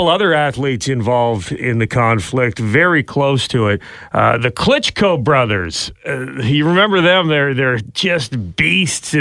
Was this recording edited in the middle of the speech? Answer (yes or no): no